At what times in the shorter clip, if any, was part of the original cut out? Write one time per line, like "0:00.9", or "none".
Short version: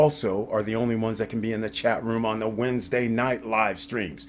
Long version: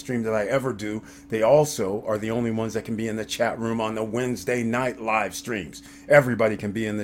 none